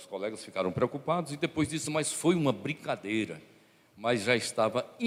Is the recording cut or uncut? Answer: uncut